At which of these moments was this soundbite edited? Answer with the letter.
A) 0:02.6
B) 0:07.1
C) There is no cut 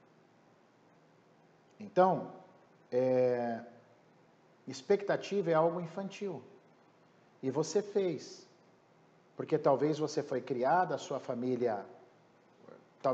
C